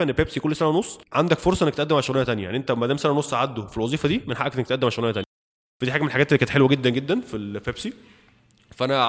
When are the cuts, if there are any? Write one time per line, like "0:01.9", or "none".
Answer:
0:01.0